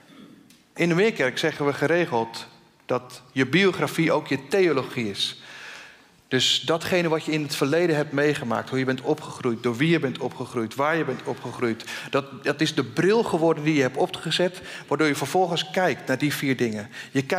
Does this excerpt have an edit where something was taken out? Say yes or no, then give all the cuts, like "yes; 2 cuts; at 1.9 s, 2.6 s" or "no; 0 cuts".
no; 0 cuts